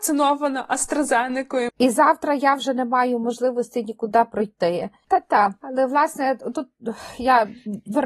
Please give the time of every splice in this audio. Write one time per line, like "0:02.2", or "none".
0:01.7
0:05.0